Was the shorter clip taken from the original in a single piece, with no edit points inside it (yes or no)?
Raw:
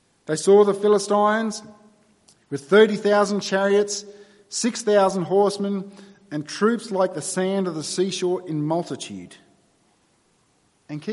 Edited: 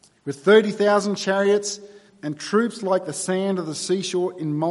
no